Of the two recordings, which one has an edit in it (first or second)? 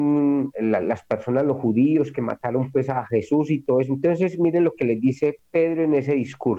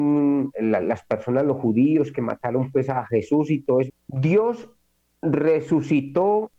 second